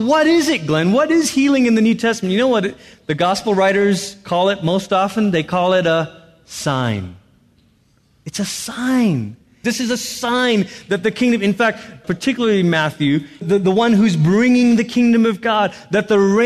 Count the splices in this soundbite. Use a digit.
3